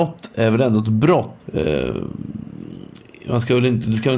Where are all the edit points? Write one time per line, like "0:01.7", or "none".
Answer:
0:01.4

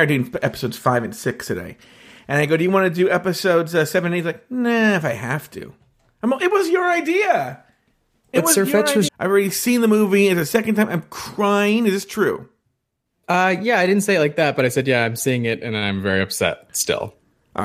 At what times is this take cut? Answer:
0:09.1

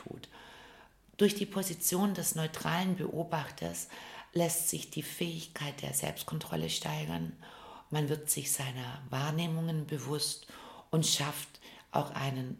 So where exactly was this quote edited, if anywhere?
none

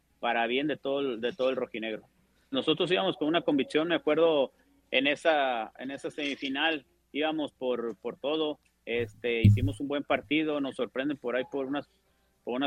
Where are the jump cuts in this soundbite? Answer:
0:02.5

